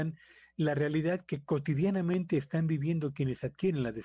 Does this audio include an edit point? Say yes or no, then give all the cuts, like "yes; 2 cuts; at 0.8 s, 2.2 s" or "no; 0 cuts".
no; 0 cuts